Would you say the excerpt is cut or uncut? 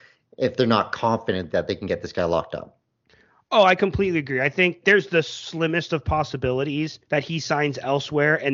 cut